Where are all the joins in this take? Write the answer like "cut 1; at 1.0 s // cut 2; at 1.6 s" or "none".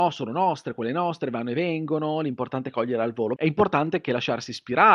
cut 1; at 3.4 s